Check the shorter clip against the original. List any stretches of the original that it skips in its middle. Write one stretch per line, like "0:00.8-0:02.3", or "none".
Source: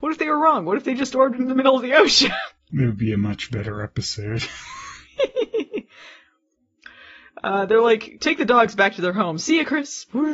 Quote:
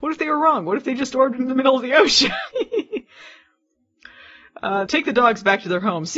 0:02.5-0:05.3
0:07.7-0:08.2